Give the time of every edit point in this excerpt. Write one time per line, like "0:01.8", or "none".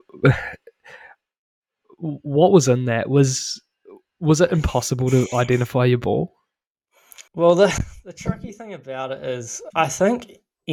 0:07.3
0:09.7